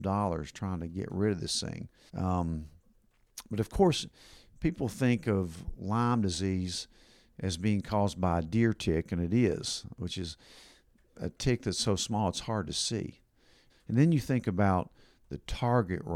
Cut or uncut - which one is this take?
cut